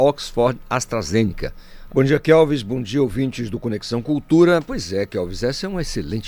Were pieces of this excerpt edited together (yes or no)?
yes